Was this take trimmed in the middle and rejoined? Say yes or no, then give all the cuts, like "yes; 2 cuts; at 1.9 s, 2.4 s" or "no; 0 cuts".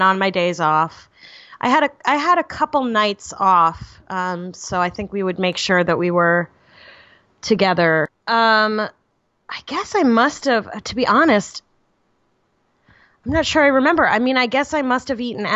no; 0 cuts